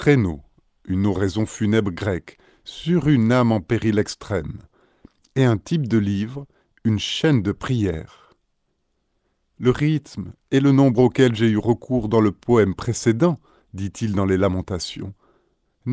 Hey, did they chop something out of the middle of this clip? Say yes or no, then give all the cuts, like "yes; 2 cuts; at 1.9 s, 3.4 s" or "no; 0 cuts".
no; 0 cuts